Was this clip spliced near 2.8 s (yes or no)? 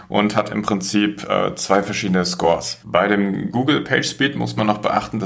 yes